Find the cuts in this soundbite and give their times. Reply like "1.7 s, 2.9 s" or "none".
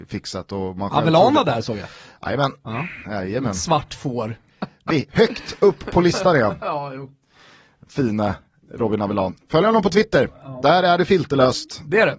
4.5 s